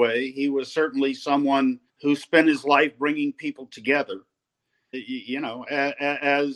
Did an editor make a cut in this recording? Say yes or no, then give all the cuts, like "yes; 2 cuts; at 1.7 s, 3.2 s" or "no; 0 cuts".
yes; 2 cuts; at 1.9 s, 4.9 s